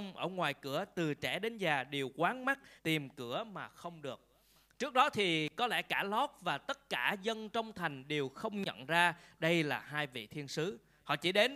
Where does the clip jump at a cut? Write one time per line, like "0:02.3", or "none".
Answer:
0:02.8